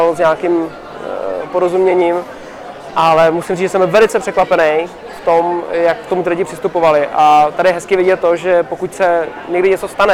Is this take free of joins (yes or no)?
yes